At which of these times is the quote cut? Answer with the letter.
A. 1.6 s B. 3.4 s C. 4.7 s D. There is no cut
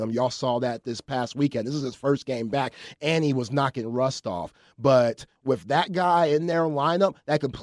D